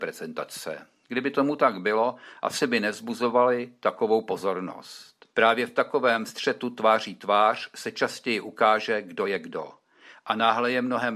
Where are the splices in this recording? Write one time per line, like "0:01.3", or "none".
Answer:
0:05.3